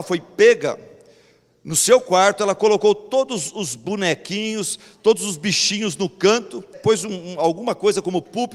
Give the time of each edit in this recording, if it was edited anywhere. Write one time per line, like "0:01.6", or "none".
0:06.7